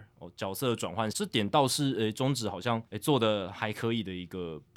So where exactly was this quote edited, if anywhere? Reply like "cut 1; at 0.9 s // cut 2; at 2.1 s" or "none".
cut 1; at 1.1 s // cut 2; at 2.9 s